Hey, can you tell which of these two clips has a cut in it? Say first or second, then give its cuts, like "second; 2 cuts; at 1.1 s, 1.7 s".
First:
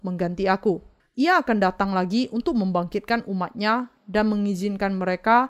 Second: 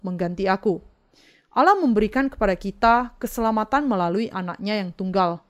first; 1 cut; at 1.0 s